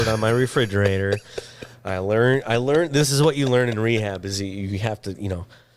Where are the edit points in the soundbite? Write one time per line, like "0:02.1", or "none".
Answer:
none